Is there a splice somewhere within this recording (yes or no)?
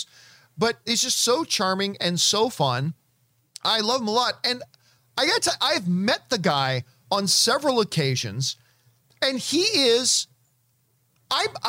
no